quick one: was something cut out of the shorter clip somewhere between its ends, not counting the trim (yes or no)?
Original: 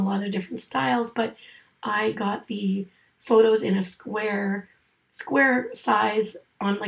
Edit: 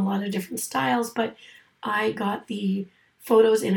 no